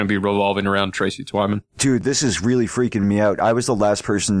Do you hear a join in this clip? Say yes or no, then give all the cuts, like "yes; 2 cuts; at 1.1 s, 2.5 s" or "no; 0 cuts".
yes; 1 cut; at 1.7 s